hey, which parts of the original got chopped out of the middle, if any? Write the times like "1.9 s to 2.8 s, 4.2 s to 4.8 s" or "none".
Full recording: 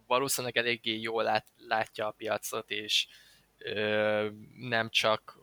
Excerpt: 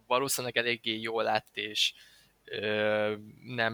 1.5 s to 2.7 s